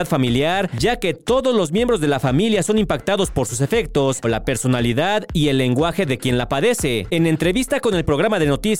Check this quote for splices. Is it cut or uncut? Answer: cut